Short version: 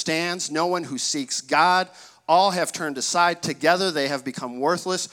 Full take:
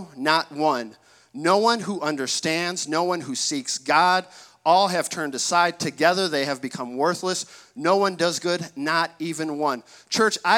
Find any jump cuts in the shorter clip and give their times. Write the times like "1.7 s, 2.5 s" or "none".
none